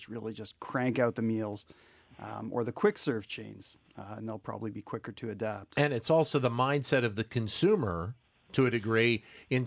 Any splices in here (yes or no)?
no